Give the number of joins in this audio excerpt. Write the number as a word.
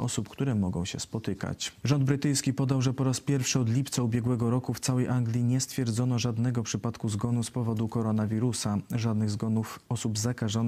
one